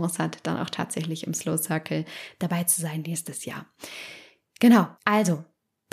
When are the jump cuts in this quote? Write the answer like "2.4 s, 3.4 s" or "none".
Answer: 4.9 s

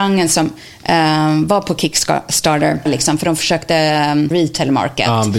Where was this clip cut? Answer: 2.9 s, 4.3 s

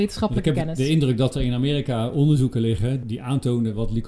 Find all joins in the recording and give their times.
3.0 s

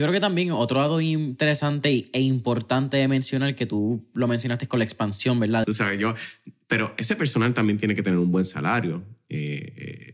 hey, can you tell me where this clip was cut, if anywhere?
5.6 s

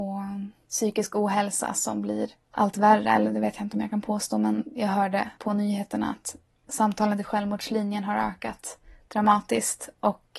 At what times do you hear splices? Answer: none

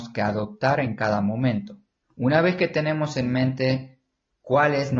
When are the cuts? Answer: 2.0 s

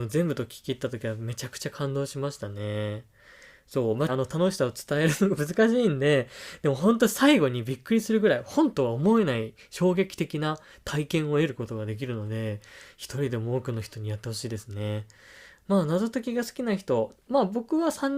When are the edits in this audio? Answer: 4.1 s

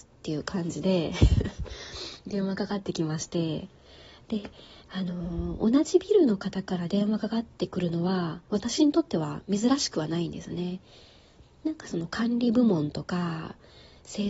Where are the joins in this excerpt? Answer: none

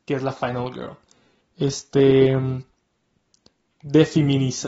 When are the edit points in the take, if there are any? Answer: 1.4 s

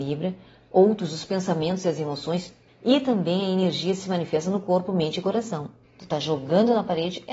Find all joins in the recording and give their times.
2.7 s, 5.8 s

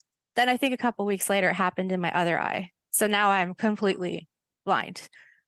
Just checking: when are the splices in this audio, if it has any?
none

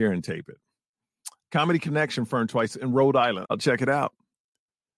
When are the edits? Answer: 1.4 s, 3.4 s

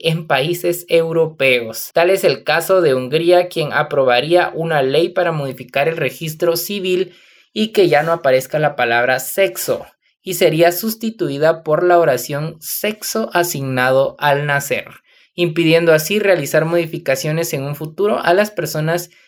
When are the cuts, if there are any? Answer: 1.9 s

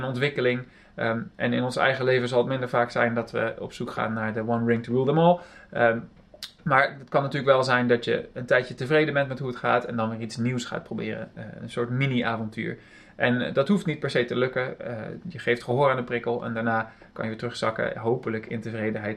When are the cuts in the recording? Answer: none

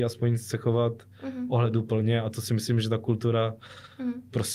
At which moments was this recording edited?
none

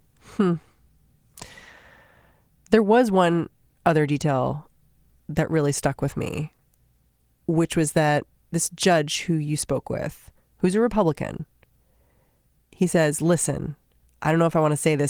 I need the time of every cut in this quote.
none

